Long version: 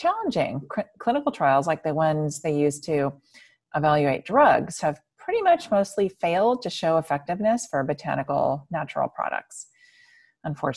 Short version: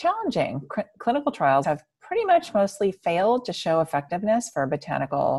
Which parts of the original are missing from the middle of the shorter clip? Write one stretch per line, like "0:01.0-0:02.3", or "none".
0:01.6-0:04.8